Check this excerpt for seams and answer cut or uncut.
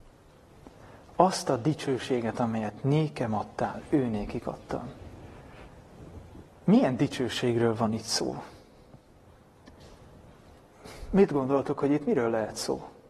uncut